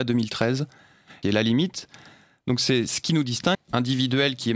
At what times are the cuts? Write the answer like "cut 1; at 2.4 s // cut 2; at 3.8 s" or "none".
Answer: cut 1; at 1.2 s // cut 2; at 3.5 s